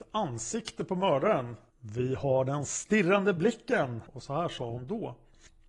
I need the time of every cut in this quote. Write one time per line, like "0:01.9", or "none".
0:01.7
0:04.1